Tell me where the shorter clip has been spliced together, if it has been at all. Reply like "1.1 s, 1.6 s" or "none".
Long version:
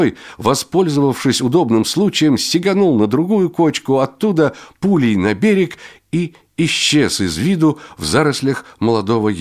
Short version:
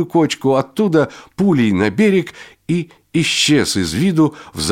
none